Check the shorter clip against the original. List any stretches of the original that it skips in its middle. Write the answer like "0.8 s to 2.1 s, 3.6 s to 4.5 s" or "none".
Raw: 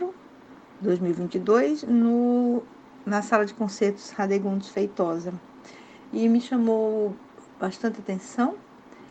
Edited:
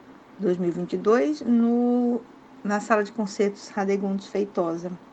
none